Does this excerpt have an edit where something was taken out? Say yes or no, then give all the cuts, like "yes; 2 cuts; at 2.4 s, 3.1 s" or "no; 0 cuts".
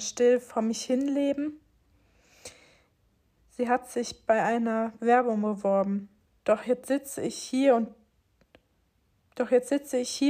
yes; 2 cuts; at 3.4 s, 6.3 s